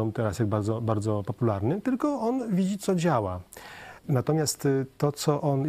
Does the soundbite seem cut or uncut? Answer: cut